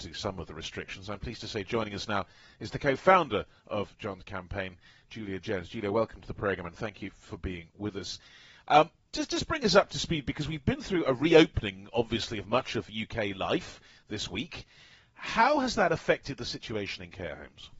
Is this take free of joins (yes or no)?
yes